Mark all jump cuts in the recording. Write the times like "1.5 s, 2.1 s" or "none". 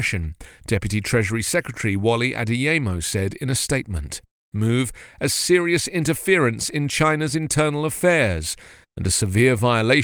4.5 s